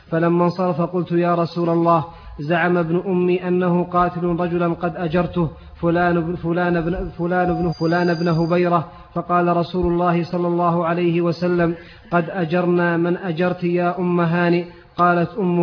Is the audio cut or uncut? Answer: cut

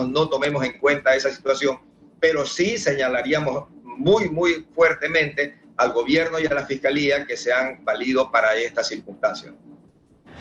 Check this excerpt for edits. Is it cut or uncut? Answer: uncut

